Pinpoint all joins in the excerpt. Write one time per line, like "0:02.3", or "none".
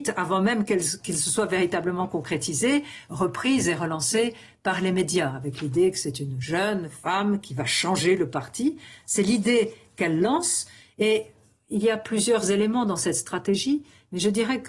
none

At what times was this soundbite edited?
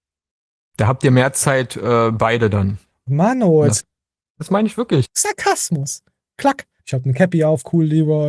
0:03.8
0:05.0
0:06.8

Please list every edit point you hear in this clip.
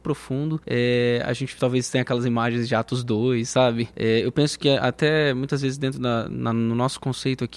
0:03.9
0:06.3

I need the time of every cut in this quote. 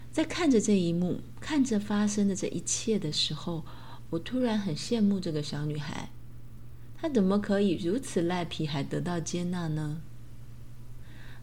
none

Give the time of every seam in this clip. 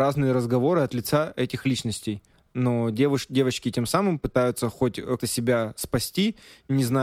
0:05.2

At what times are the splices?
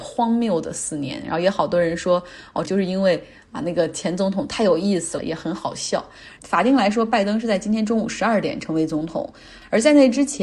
0:02.6
0:05.2
0:06.4

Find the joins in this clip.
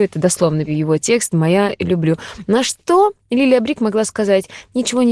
none

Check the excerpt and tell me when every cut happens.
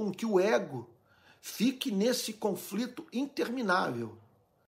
none

